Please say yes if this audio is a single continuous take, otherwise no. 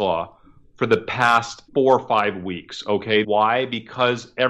no